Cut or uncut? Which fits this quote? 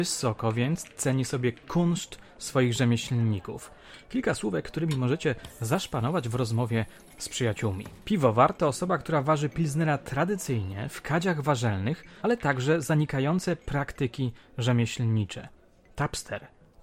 cut